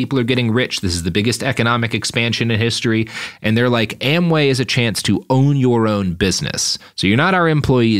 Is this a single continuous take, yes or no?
yes